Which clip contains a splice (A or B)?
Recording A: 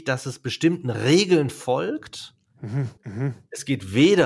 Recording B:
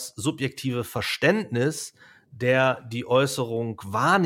A